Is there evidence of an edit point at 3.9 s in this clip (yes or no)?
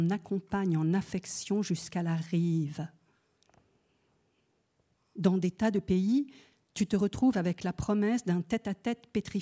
no